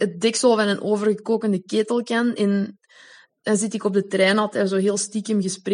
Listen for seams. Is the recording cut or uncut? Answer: uncut